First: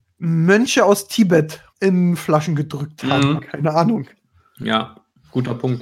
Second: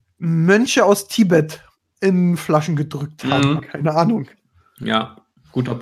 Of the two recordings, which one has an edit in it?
first; 1 cut; at 1.7 s

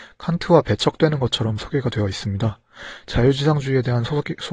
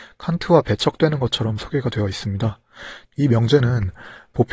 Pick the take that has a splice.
second; 1 cut; at 3.0 s

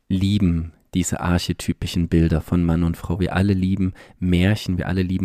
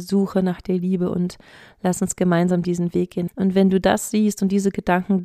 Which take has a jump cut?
second; 1 cut; at 3.3 s

